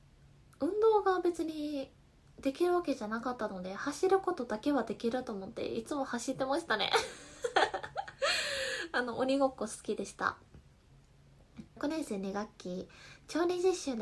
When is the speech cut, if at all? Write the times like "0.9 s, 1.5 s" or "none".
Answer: 11.8 s